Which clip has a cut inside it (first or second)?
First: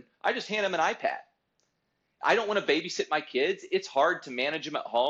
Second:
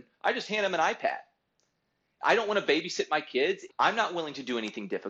second